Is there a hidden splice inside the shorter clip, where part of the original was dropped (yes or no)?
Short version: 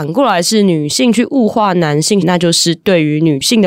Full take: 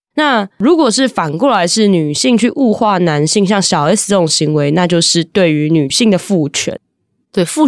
yes